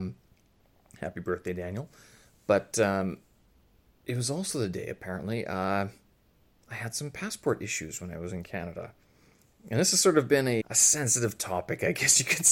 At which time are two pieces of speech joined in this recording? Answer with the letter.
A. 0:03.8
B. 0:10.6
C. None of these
B